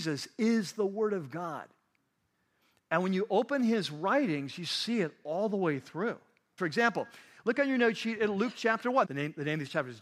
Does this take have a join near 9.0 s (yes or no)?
yes